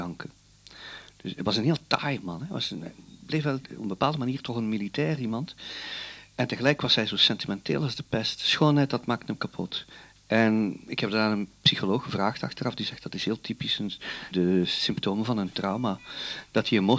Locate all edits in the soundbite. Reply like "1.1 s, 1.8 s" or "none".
14.3 s